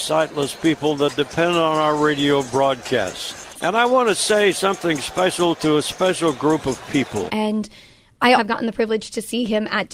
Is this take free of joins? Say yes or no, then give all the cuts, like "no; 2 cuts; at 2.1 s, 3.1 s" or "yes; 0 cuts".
no; 3 cuts; at 3.5 s, 7.3 s, 8.4 s